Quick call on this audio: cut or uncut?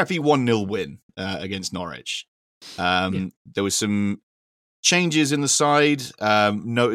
uncut